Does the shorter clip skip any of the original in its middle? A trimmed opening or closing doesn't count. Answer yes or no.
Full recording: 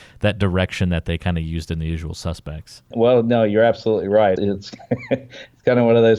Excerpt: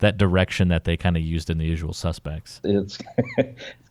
yes